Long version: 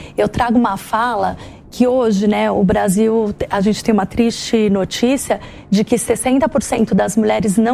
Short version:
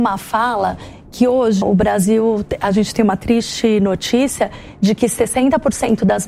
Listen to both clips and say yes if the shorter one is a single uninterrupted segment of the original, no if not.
no